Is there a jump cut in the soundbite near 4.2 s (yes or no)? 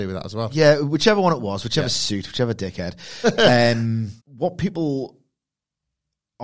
yes